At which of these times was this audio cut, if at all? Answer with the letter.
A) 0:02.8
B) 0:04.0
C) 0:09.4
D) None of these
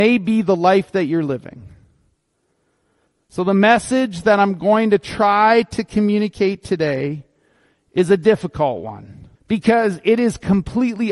C